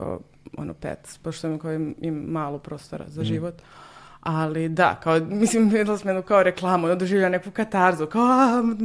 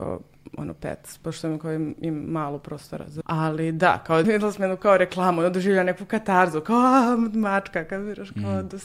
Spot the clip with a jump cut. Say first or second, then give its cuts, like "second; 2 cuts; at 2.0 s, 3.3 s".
second; 2 cuts; at 3.2 s, 4.2 s